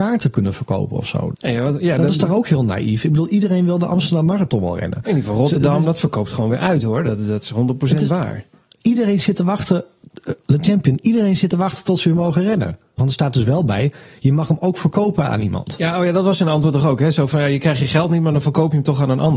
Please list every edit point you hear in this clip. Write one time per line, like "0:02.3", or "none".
0:01.3
0:13.0

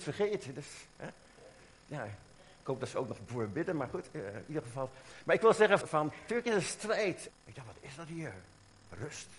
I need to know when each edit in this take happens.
0:05.8
0:07.3

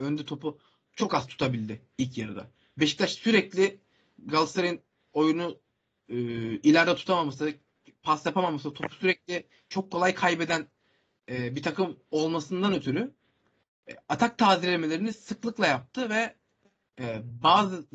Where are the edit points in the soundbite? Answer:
none

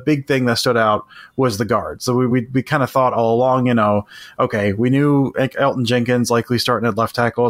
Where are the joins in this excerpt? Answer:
none

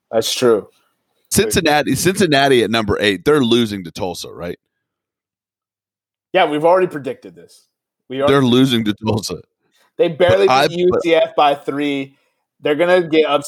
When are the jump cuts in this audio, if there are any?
0:01.3

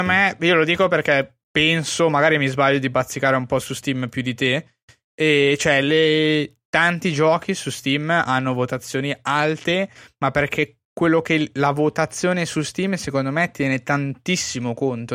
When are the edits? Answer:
none

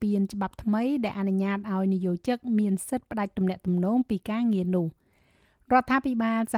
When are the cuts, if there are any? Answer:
none

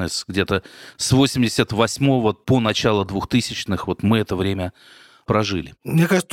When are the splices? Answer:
none

